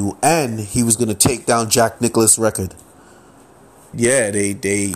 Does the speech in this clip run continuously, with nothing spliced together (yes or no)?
no